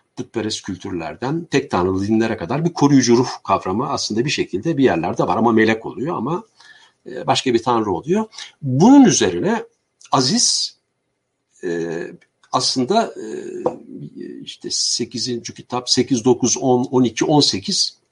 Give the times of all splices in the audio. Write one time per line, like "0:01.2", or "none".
0:15.4